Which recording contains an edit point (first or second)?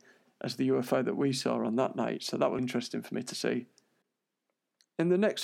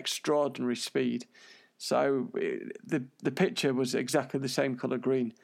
first